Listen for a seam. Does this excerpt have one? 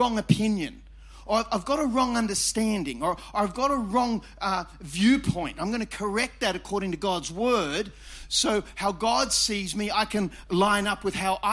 no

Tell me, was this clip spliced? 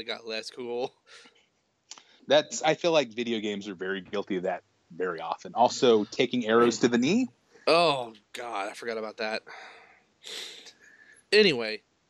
yes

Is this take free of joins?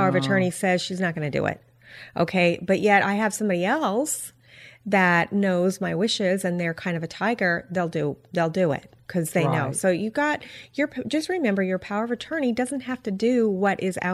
yes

